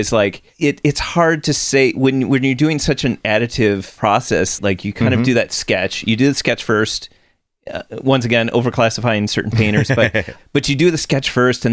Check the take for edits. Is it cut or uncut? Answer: cut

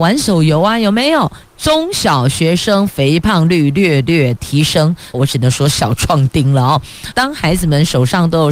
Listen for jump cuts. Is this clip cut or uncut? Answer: cut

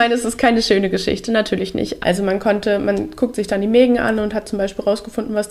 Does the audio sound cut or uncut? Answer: cut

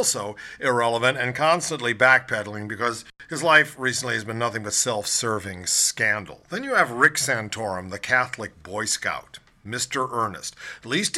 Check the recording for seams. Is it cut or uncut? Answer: uncut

